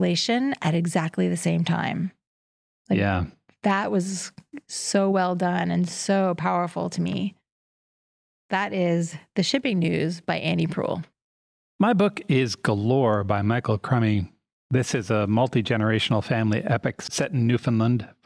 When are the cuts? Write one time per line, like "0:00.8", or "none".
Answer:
none